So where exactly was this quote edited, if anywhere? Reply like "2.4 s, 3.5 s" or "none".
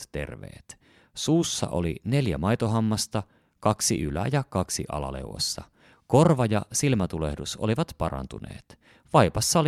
none